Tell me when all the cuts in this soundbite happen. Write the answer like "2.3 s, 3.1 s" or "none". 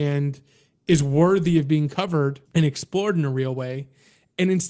2.5 s